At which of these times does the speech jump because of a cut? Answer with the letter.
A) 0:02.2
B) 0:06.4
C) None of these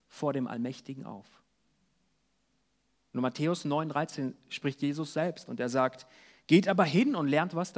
C